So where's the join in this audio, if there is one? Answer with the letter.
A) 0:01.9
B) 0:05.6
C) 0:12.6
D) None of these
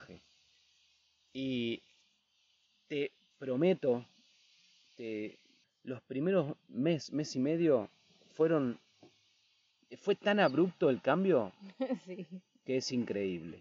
B